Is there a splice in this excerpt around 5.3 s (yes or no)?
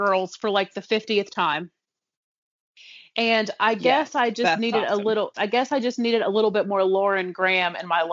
yes